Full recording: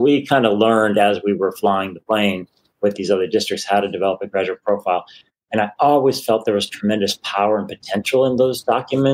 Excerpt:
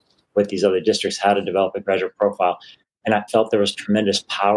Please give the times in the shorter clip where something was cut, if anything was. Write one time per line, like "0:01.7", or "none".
0:03.3